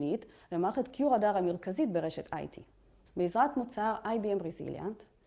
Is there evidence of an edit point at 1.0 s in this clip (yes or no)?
no